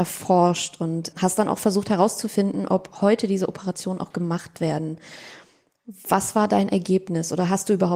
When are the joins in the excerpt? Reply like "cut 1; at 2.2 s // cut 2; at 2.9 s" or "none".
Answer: cut 1; at 1.1 s